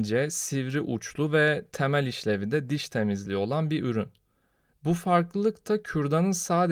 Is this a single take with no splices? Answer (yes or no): no